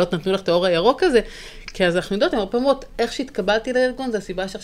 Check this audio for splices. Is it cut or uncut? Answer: uncut